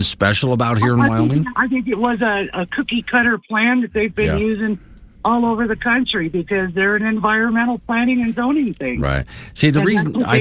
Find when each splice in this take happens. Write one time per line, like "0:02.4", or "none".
0:01.5